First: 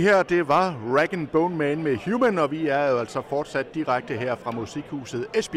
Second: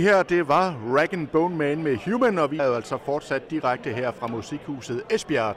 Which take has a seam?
second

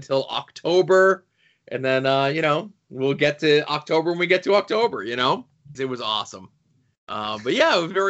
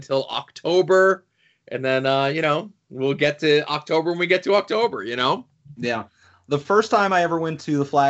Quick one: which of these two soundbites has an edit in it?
first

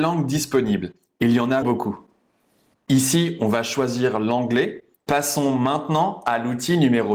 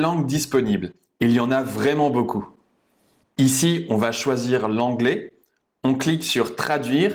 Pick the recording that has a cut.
first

